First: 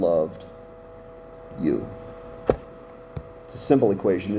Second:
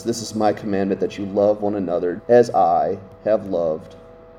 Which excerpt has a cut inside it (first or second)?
second